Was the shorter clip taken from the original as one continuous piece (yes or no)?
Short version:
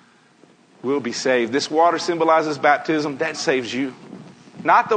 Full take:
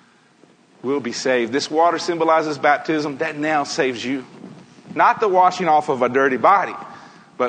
no